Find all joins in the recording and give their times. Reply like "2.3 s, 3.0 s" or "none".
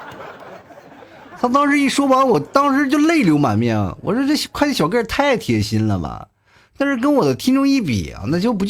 none